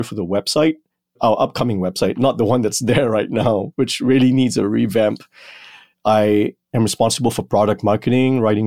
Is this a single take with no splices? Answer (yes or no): yes